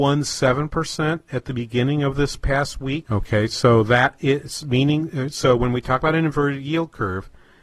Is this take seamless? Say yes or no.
no